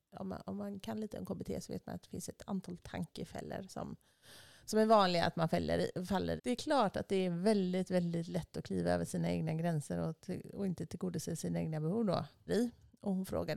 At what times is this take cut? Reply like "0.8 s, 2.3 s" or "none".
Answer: 6.4 s, 12.5 s